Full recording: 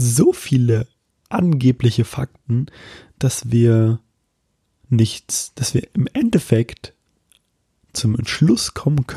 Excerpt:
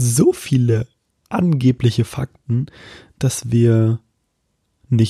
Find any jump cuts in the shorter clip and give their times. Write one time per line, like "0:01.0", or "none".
none